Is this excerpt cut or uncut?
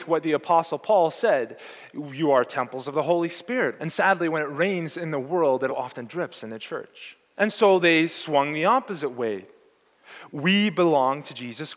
cut